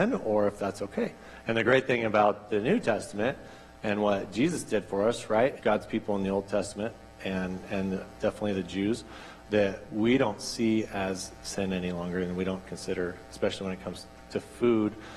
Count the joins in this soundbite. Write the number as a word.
two